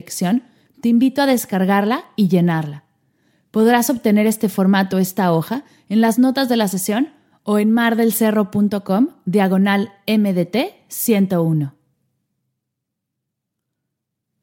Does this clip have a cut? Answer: no; 0 cuts

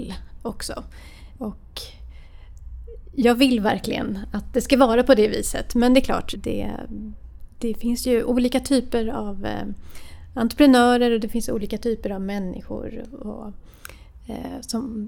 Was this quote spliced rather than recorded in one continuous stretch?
yes; 1 cut; at 6.3 s

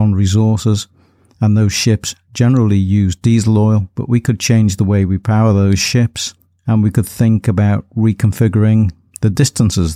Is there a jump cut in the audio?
no; 0 cuts

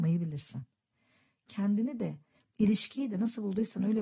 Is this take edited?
no; 0 cuts

